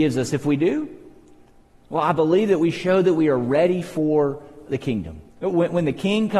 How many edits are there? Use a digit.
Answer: 1